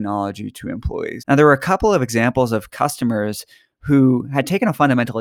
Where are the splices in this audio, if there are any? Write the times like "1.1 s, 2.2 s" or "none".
1.2 s

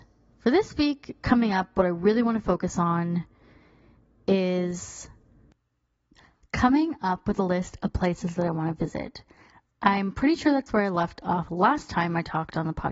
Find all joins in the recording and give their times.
none

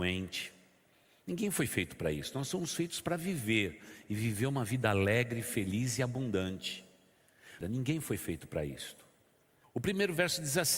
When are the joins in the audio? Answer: 7.6 s, 9.6 s

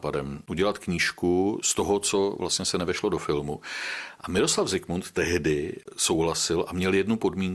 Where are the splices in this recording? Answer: none

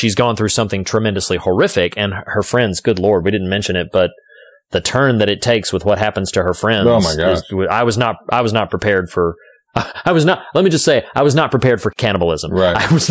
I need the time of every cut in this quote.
none

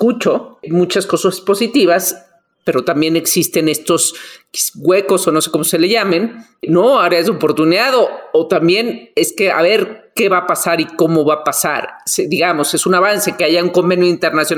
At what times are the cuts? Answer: none

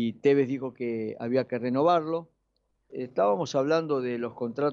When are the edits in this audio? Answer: 2.9 s

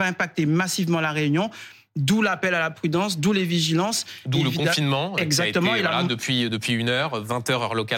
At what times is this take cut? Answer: none

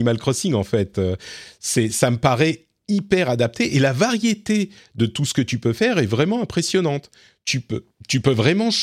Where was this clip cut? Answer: none

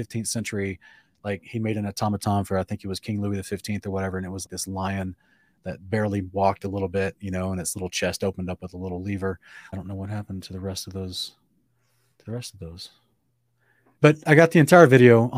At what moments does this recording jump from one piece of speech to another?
4.4 s, 9.7 s, 14.0 s

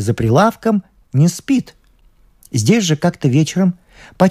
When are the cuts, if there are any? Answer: none

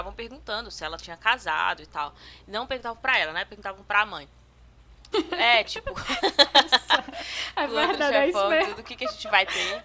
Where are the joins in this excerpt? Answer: 5.1 s

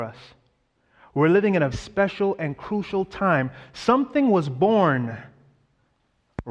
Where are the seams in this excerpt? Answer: 1.7 s

